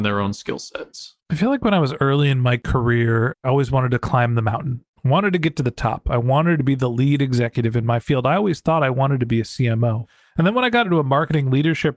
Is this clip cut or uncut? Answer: cut